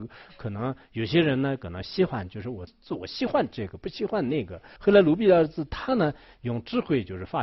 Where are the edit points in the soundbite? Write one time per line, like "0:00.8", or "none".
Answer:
0:02.7
0:04.8